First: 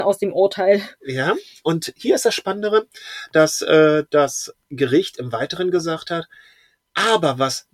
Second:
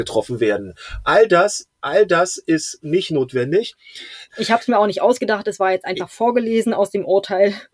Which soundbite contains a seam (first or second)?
second